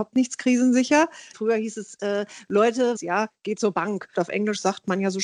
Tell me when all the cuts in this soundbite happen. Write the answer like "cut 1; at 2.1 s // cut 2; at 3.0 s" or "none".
cut 1; at 1.3 s // cut 2; at 3.0 s // cut 3; at 4.1 s